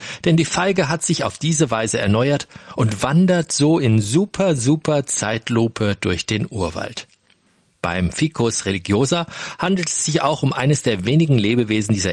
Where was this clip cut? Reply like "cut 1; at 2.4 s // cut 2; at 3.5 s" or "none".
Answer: none